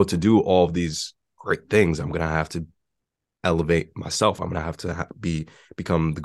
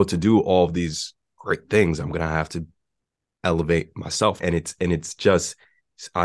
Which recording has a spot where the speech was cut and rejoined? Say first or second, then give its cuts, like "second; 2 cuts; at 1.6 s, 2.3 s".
second; 1 cut; at 4.4 s